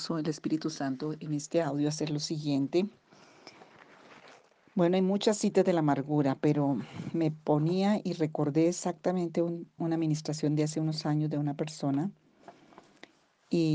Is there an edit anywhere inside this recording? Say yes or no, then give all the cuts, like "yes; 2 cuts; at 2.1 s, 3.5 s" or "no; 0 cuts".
yes; 1 cut; at 9.8 s